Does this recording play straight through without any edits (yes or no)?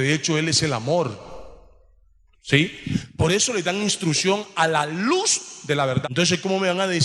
no